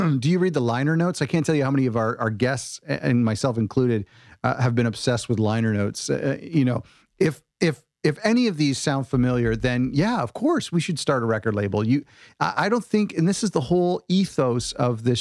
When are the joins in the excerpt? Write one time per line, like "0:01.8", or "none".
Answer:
none